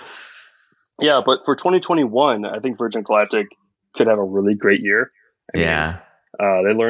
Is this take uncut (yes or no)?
yes